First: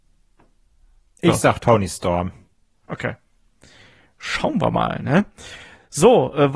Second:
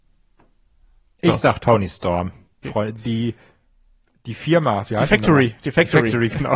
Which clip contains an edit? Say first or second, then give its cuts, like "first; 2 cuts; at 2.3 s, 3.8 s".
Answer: second; 1 cut; at 2.6 s